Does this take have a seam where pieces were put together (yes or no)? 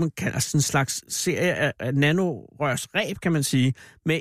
yes